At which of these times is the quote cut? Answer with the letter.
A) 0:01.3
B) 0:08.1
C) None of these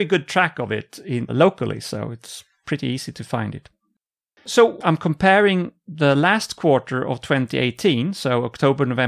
A